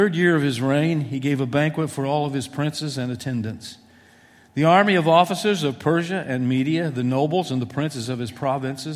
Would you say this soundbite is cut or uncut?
uncut